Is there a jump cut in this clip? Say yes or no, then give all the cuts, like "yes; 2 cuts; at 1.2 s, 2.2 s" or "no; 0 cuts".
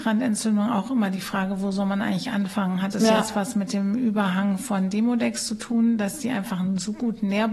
no; 0 cuts